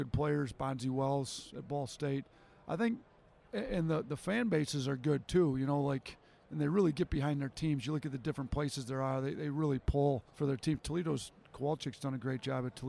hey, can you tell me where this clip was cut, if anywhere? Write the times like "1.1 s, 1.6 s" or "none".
10.3 s, 11.4 s